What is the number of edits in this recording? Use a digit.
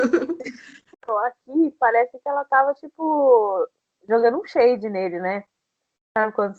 1